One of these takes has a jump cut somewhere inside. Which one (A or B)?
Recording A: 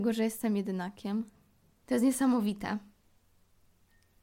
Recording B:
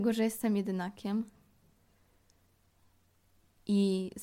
A